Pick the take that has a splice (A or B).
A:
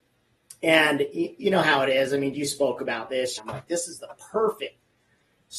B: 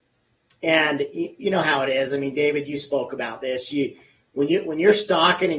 A